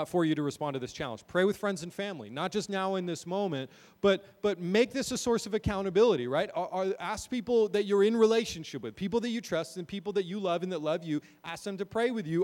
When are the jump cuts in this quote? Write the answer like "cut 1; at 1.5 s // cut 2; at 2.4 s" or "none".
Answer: none